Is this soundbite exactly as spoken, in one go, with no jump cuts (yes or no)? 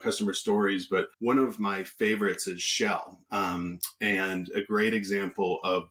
no